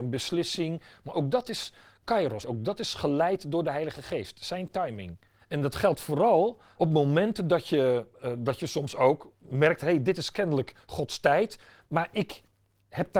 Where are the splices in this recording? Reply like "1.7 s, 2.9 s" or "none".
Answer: 2.4 s, 5.4 s, 6.8 s